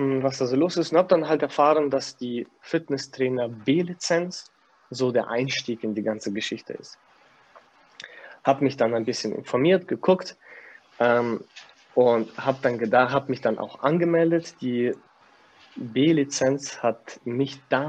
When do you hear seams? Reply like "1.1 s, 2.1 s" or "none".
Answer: none